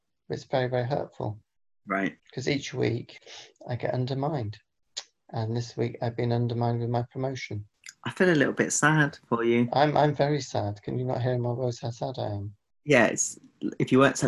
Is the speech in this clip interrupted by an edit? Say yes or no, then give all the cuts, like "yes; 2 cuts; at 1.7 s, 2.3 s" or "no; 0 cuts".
yes; 1 cut; at 2.2 s